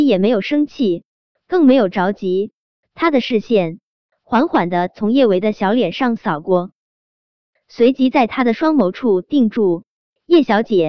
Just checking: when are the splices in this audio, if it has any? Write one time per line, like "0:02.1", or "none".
none

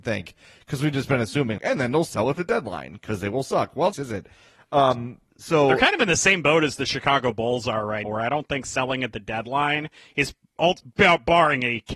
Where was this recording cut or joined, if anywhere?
0:01.6
0:03.9
0:08.0

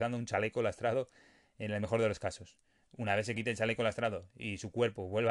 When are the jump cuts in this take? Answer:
none

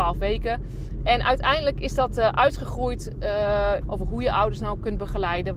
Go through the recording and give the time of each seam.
0:01.0
0:03.8

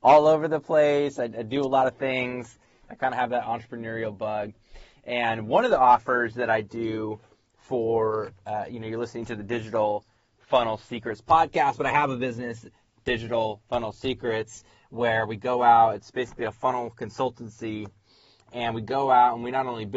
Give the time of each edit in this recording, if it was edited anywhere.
none

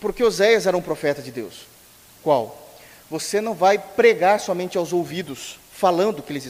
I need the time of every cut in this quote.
0:02.2

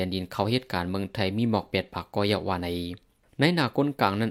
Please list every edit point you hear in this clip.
none

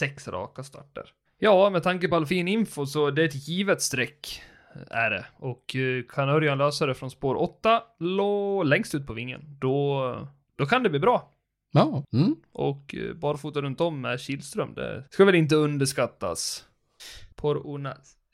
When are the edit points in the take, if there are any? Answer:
0:12.0
0:15.1
0:17.3

